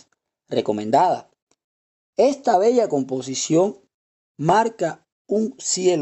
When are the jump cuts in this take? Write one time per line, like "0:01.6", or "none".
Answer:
none